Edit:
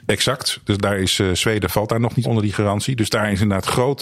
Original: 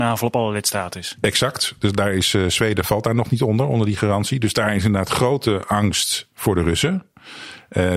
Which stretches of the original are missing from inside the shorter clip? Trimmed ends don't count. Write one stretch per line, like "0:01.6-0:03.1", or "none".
0:03.4-0:03.7